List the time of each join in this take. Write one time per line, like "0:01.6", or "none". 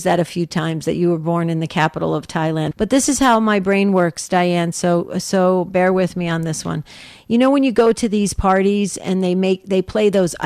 0:02.7